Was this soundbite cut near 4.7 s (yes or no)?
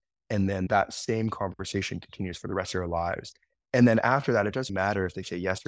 yes